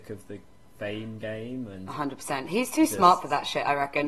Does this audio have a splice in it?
no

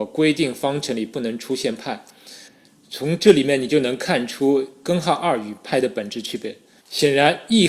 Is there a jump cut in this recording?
yes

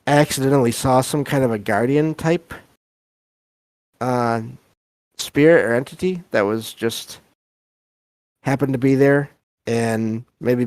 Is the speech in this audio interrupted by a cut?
no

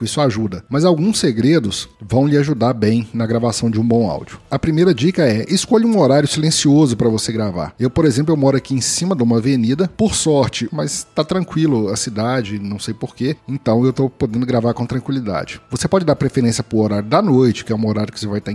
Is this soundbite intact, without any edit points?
no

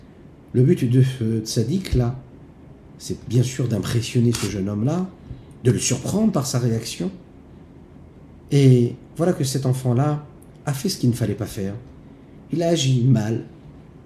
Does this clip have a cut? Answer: yes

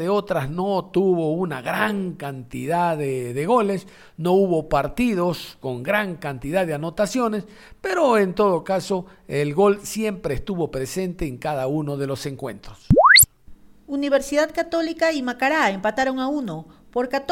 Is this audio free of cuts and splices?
yes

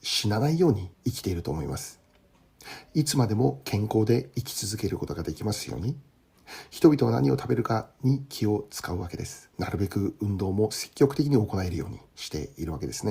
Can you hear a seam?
yes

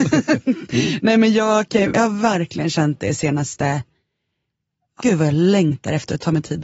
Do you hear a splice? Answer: yes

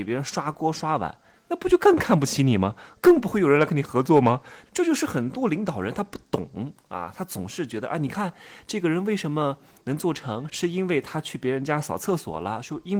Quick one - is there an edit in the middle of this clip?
yes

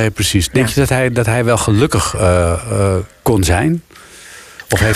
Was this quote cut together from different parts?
no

